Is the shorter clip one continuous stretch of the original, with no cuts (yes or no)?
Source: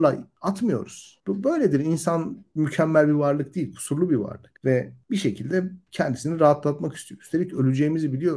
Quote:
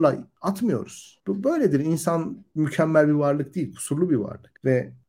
yes